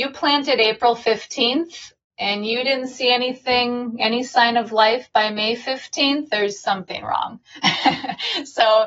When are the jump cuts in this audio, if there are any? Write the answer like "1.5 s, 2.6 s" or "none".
none